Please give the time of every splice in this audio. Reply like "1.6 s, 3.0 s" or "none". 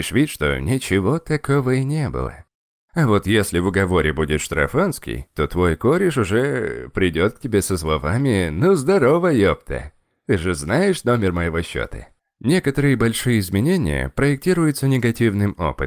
none